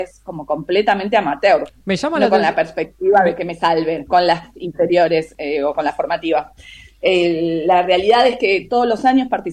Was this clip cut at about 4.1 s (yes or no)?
yes